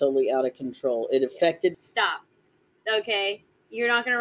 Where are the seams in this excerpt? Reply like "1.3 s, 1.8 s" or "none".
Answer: 1.7 s